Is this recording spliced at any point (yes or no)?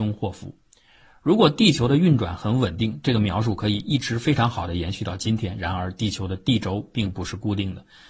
no